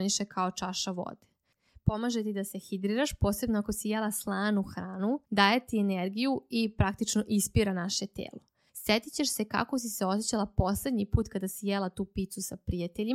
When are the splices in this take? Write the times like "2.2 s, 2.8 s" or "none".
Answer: 5.2 s, 8.7 s

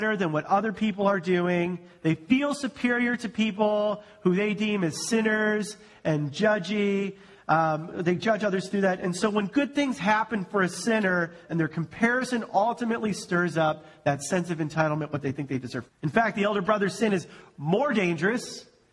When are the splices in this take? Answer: 11.4 s, 15.9 s

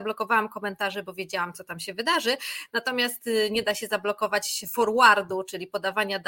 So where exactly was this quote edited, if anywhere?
none

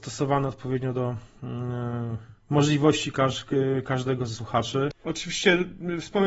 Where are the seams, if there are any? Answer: 2.4 s, 4.9 s

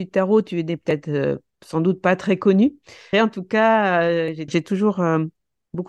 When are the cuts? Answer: 3.1 s, 4.5 s

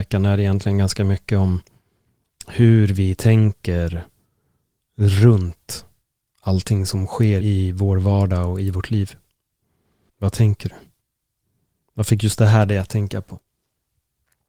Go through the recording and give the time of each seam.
7.4 s, 10.1 s

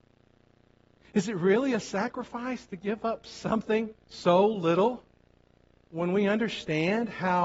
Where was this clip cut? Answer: 1.0 s, 4.0 s

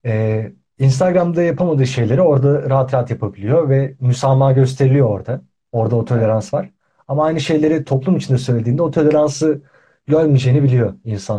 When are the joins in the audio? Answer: none

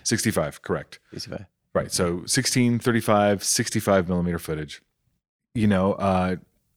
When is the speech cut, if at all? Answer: none

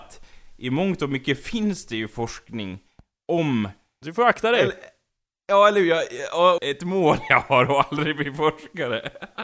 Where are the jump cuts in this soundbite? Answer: 4.0 s, 6.6 s

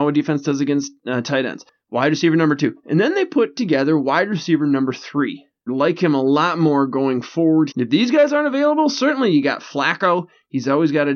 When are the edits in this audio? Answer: 5.7 s, 7.7 s

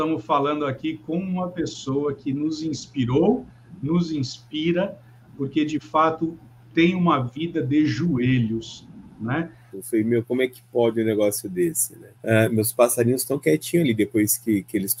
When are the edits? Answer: 9.7 s, 12.2 s

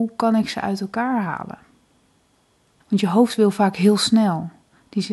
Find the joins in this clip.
2.8 s

